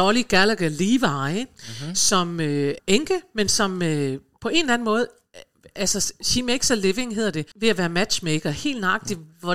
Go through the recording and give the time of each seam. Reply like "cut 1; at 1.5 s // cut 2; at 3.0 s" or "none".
cut 1; at 2.8 s // cut 2; at 7.5 s